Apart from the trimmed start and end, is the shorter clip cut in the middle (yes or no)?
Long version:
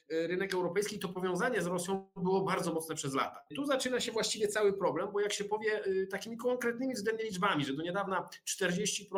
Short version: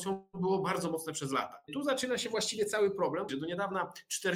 yes